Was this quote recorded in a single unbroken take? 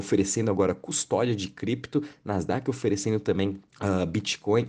no; 1 cut; at 3.7 s

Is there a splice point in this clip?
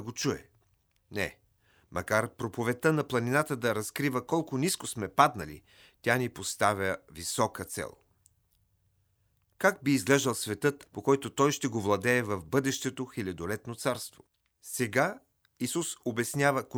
yes; 3 cuts; at 1.0 s, 10.9 s, 14.5 s

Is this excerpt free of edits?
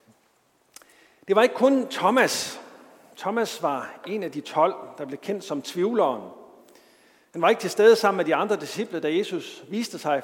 yes; 0 cuts

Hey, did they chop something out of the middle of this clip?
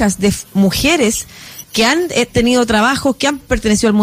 yes; 1 cut; at 1.6 s

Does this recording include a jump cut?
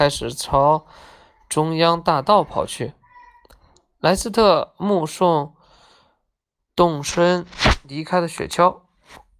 no; 0 cuts

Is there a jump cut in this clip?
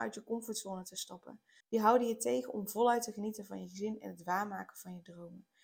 yes; 1 cut; at 1.6 s

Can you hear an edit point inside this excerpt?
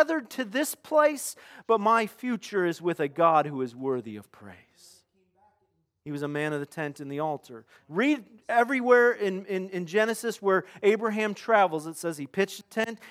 yes; 1 cut; at 7.8 s

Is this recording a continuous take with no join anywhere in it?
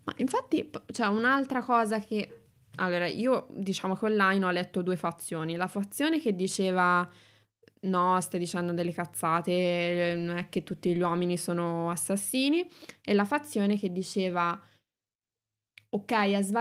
yes; 0 cuts

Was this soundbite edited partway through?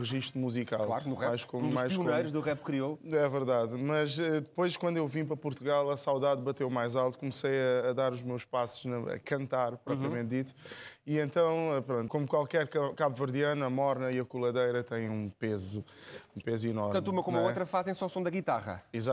yes; 1 cut; at 12.1 s

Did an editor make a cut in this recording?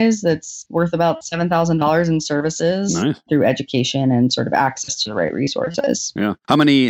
yes; 1 cut; at 3.3 s

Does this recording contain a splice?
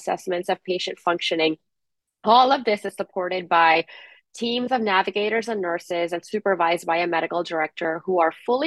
no; 0 cuts

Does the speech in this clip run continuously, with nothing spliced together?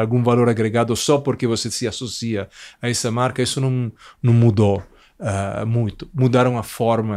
yes; 0 cuts

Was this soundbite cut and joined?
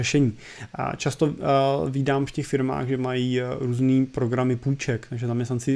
no; 0 cuts

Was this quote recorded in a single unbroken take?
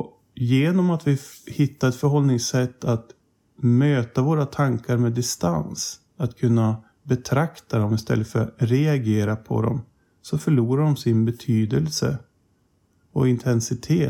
yes; 0 cuts

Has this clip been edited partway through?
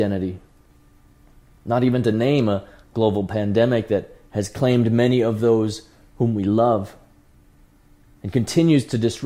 no; 0 cuts

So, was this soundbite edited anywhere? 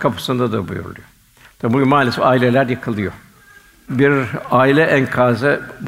yes; 1 cut; at 1.4 s

